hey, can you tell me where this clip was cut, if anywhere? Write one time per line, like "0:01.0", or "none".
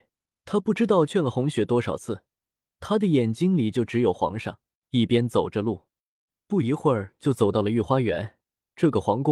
0:02.7
0:04.8

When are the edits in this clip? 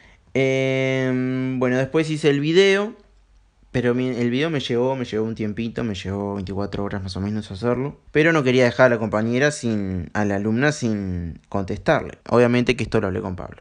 0:08.1
0:12.2

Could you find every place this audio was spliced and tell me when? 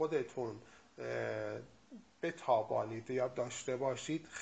none

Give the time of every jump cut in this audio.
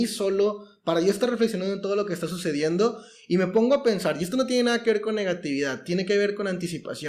none

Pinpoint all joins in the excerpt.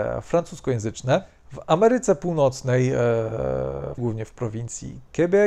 0:04.0

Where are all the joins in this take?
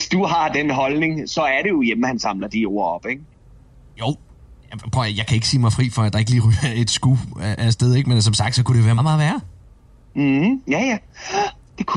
0:09.0
0:10.6

